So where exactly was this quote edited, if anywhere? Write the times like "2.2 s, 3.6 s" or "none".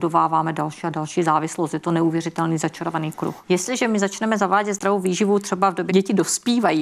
3.4 s, 5.9 s